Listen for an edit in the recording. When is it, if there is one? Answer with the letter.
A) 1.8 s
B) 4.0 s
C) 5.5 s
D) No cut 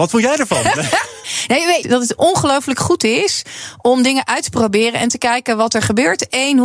A